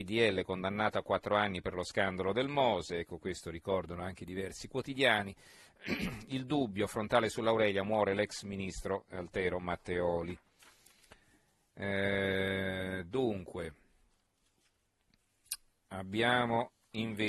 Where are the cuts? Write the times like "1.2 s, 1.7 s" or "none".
none